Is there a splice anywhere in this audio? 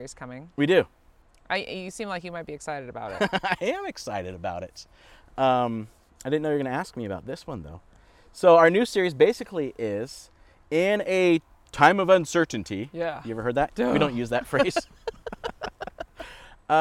yes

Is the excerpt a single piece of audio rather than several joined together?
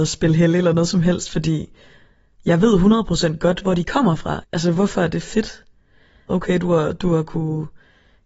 no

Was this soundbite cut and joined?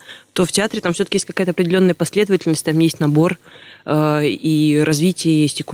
no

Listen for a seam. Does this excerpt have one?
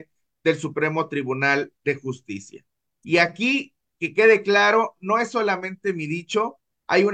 no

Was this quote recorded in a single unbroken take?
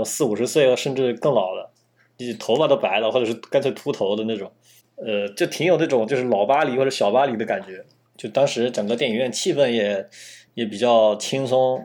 yes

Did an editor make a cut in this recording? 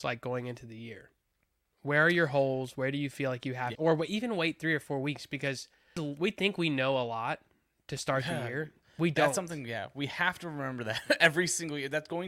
yes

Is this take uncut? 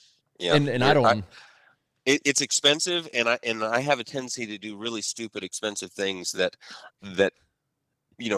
yes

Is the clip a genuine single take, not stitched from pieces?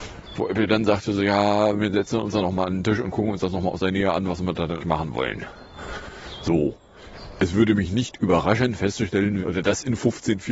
no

